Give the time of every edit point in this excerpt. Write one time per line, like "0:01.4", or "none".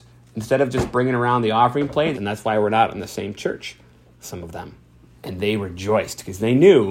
0:02.1
0:05.2